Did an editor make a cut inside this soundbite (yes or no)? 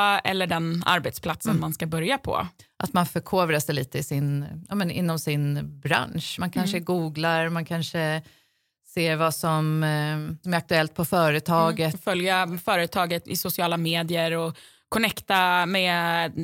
no